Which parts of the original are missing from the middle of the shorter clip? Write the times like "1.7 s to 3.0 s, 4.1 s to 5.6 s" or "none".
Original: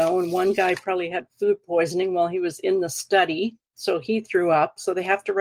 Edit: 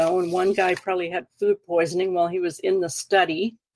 none